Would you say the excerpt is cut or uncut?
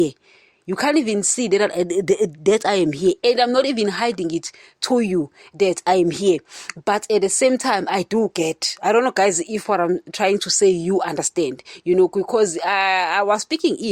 uncut